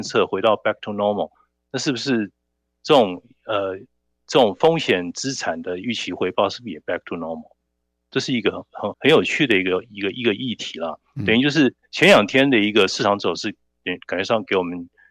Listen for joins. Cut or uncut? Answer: cut